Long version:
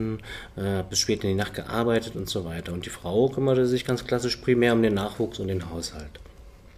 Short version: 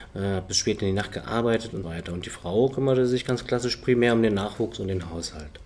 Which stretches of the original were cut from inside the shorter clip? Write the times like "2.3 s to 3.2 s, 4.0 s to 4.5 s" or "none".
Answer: 2.3 s to 2.4 s